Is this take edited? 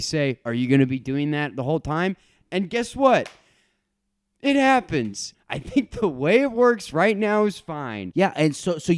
yes; 1 cut; at 5.3 s

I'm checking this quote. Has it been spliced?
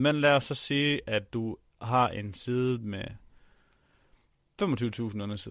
no; 0 cuts

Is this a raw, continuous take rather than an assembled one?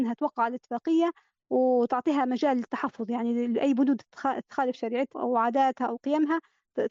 no; 1 cut; at 5.1 s

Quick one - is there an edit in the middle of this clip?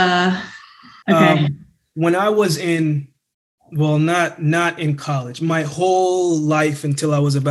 yes; 1 cut; at 1.0 s

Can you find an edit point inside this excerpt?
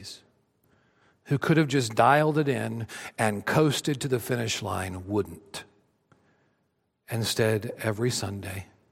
no; 0 cuts

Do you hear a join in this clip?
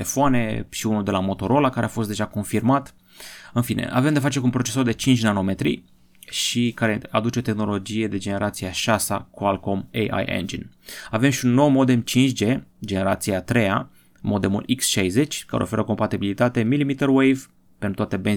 no; 0 cuts

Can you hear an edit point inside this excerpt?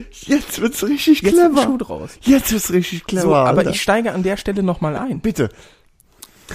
no; 0 cuts

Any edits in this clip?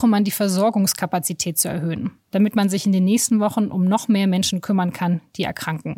no; 0 cuts

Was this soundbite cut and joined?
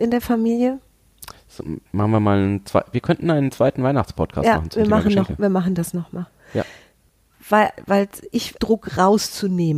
yes; 1 cut; at 8.6 s

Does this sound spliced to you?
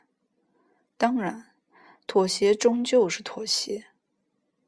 no; 0 cuts

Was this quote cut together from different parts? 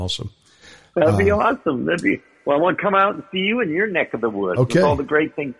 no; 0 cuts

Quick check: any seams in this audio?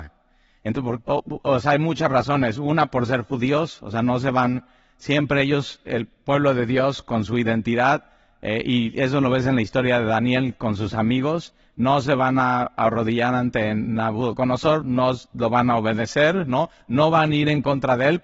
yes; 1 cut; at 14.8 s

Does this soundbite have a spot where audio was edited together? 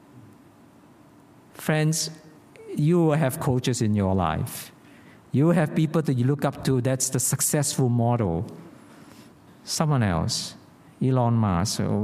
yes; 1 cut; at 9.5 s

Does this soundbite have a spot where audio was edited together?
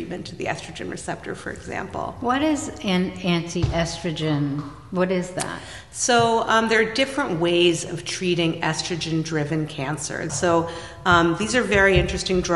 yes; 1 cut; at 10.3 s

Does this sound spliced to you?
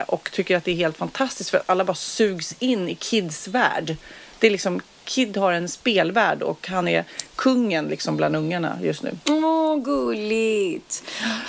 no; 0 cuts

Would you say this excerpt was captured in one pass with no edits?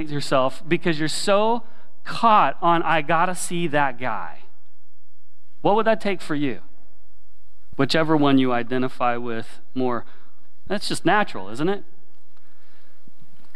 no; 2 cuts; at 7.7 s, 10.7 s

